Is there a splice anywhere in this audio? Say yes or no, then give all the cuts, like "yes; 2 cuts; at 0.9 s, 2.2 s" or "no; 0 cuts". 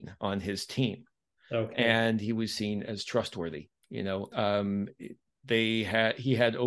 yes; 1 cut; at 4.3 s